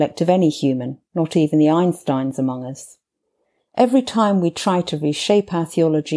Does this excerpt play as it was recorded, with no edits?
yes; 0 cuts

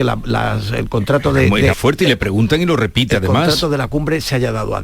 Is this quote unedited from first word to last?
no; 1 cut; at 1.7 s

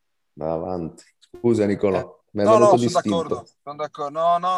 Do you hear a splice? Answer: yes; 1 cut; at 2.2 s

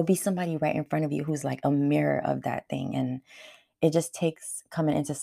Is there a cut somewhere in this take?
no; 0 cuts

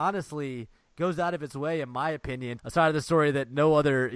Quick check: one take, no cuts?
no; 1 cut; at 2.6 s

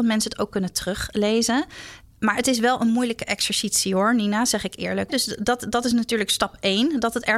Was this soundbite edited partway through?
yes; 2 cuts; at 2.0 s, 5.1 s

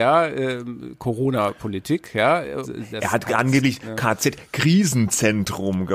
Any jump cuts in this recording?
yes; 1 cut; at 2.6 s

